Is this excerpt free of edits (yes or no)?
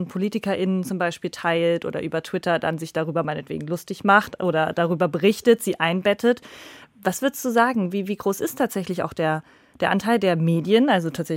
yes